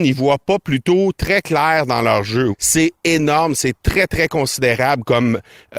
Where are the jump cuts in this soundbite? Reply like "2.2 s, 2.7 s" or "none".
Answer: 2.5 s